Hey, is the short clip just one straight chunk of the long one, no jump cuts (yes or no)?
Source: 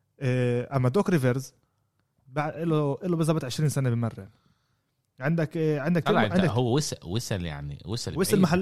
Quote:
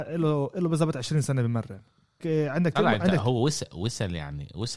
no